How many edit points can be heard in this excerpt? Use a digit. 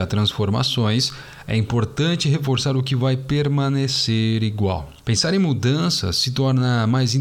1